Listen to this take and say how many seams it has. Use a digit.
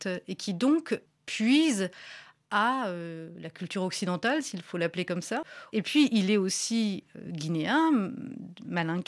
0